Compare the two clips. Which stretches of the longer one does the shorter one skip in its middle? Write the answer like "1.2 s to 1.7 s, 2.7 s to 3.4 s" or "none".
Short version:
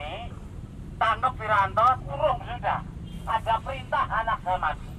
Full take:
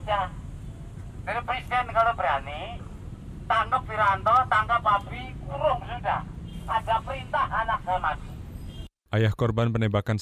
4.5 s to 5.4 s